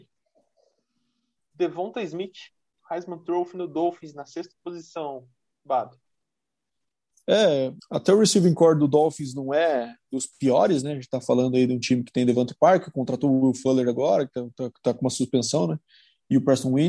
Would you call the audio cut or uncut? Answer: cut